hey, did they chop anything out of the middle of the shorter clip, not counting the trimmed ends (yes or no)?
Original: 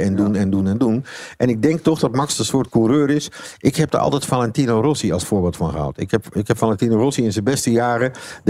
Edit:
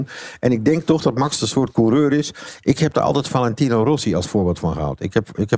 no